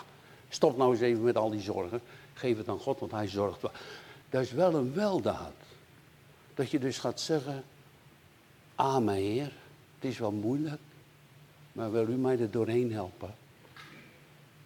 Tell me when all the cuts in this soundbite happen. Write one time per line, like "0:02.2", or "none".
0:04.2